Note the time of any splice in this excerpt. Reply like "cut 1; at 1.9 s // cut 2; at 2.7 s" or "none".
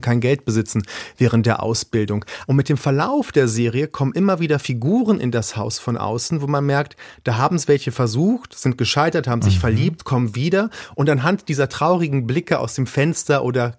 cut 1; at 2.4 s